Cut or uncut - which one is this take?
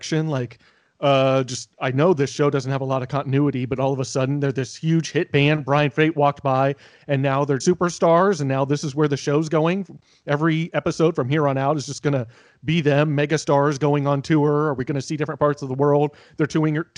cut